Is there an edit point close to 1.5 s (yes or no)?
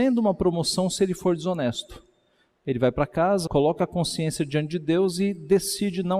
no